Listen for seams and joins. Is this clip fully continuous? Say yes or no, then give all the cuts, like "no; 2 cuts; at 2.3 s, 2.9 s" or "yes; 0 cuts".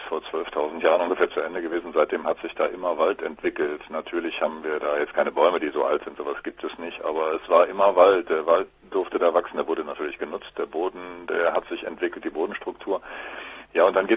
yes; 0 cuts